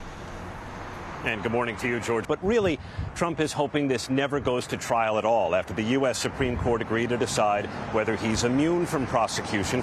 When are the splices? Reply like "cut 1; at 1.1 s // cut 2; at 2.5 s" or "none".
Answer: cut 1; at 2.2 s